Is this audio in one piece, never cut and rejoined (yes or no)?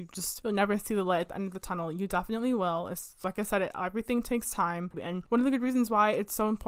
no